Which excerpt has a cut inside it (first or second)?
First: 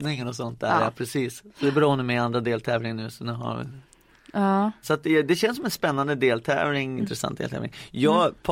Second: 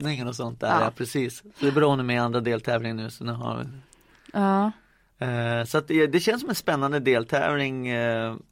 first